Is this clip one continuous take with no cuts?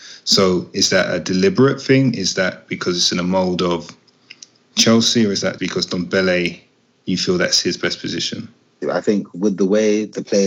no; 2 cuts; at 5.6 s, 8.8 s

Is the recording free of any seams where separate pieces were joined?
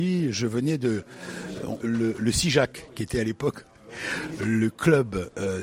no; 1 cut; at 1.8 s

